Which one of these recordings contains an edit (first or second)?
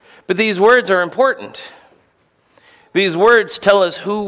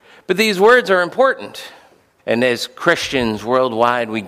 second